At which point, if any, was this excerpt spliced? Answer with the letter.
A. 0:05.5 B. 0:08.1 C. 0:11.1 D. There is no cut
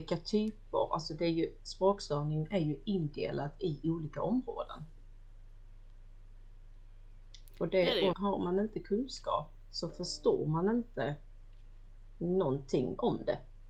B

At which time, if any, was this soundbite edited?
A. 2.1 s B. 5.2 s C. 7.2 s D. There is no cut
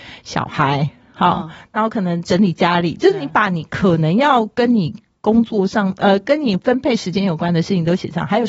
D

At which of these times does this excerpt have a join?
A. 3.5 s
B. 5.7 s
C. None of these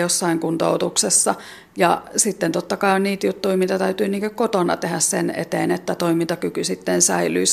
C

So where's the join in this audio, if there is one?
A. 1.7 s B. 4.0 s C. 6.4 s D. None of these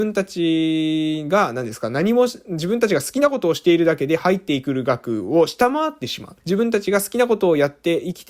C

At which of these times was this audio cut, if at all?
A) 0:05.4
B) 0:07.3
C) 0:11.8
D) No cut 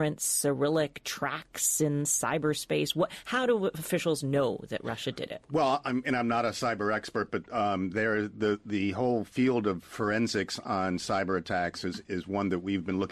D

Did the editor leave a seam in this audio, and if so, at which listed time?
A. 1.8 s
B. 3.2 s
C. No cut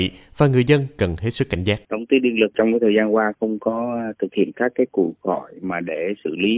A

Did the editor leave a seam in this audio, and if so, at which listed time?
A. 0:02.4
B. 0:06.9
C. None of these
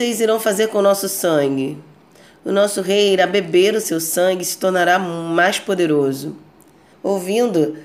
B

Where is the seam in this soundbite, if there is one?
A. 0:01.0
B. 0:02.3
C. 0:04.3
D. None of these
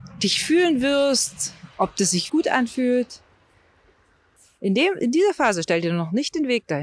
B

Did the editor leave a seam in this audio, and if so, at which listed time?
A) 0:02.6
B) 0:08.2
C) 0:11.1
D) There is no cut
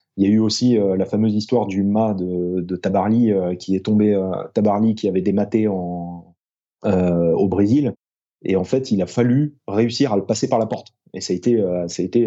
B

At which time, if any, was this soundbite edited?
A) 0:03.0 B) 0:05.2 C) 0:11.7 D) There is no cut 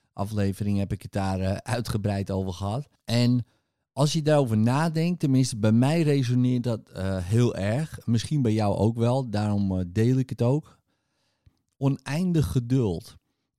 A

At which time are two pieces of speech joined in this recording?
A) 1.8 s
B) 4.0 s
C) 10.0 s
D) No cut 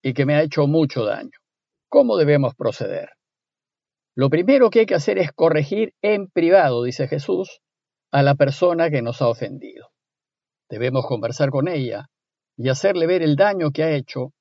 A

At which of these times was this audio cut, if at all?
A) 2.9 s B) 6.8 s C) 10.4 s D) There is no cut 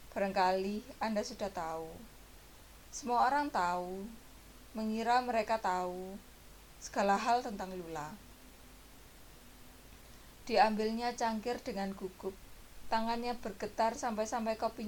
D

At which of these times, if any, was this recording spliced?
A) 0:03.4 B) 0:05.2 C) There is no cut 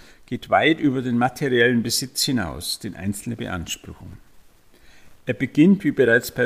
C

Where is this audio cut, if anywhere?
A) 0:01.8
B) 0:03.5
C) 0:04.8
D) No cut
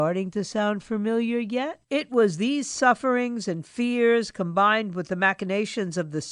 A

